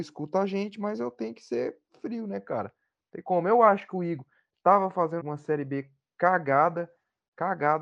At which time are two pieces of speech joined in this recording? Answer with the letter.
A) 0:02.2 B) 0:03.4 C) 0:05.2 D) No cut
C